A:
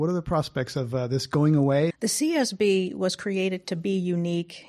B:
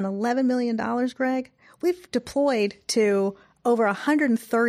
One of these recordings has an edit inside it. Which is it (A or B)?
A